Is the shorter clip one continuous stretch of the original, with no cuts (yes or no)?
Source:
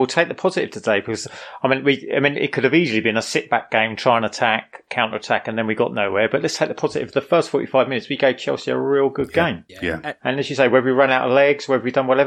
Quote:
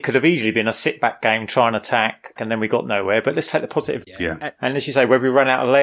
no